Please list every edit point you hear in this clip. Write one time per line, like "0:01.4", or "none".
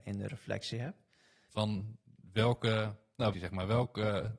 0:01.5
0:03.3

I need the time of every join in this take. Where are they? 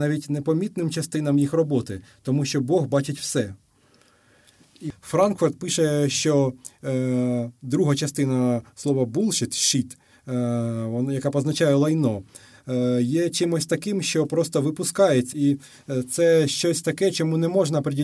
0:15.3

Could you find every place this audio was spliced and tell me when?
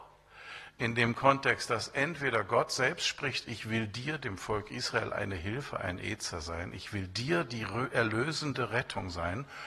none

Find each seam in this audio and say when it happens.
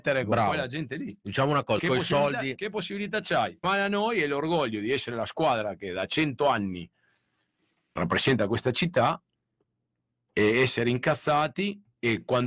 0:01.8
0:03.6
0:08.0

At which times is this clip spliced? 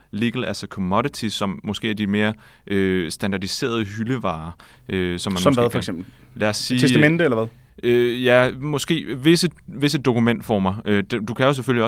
none

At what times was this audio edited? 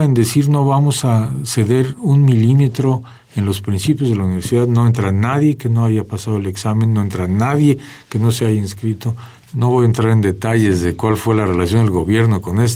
0:09.4

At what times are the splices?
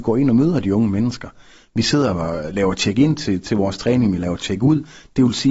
none

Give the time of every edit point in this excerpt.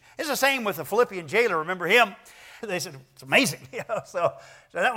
0:02.6

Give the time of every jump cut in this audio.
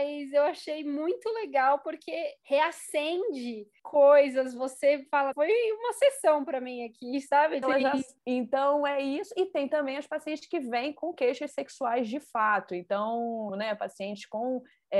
0:05.3
0:07.6
0:13.5

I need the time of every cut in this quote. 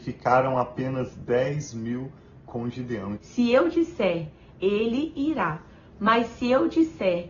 0:03.2
0:04.5

